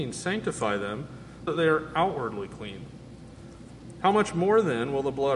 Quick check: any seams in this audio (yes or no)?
yes